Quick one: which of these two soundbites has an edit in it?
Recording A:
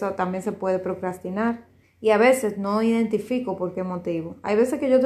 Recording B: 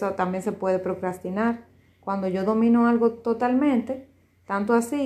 A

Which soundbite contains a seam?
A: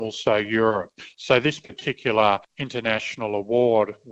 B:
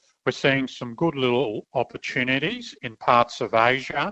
B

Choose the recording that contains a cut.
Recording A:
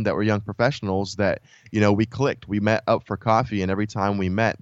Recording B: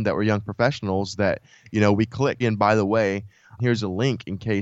B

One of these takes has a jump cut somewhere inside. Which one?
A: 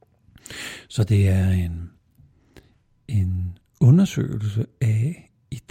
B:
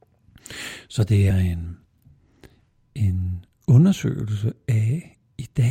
B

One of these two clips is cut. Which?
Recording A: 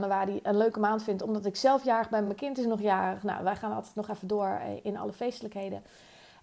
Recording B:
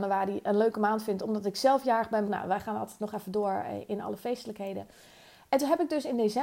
B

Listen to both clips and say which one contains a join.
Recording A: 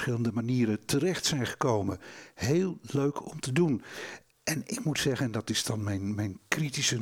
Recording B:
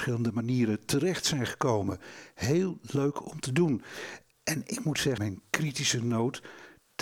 B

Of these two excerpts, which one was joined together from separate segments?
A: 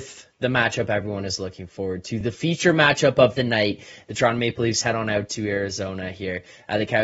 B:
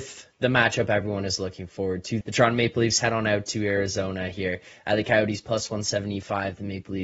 B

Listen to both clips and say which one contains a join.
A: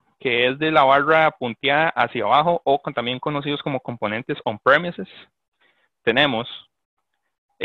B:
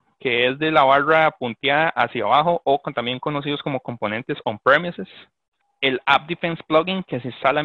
B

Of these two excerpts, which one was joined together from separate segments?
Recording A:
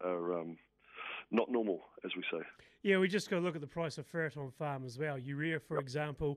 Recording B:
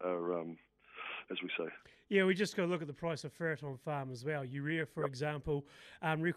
B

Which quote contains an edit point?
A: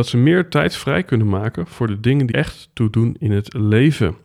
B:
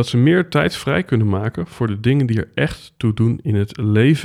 A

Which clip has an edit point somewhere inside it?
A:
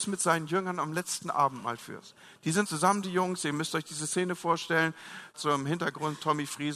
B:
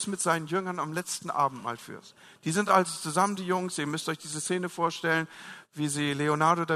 A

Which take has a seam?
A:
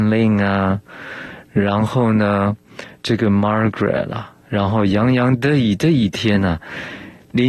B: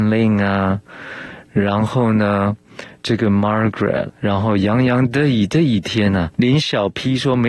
B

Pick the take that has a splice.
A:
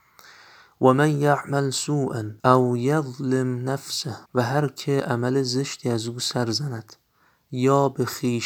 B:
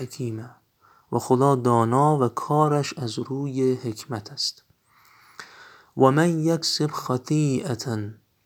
A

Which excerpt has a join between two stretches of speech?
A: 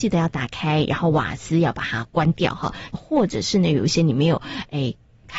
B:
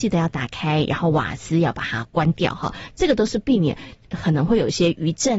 A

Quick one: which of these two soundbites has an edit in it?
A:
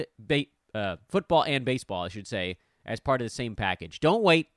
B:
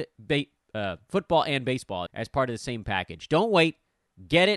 B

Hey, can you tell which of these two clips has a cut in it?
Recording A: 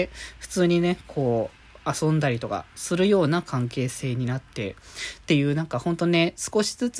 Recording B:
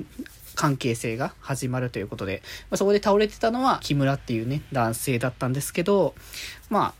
B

